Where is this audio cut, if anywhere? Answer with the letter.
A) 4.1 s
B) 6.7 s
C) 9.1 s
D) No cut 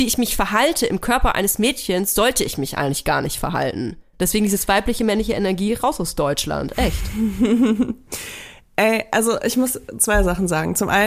A